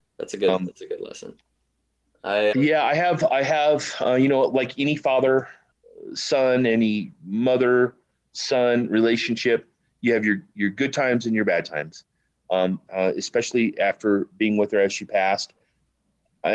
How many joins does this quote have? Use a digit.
2